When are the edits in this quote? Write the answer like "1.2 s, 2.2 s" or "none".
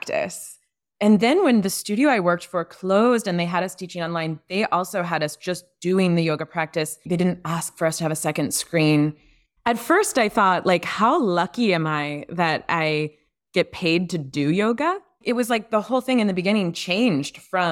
none